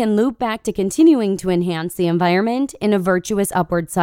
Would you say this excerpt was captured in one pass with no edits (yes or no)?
yes